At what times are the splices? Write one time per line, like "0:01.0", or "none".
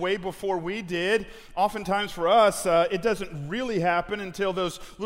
none